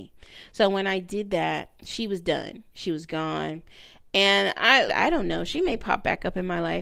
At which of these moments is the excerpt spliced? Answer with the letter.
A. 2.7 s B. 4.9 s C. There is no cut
B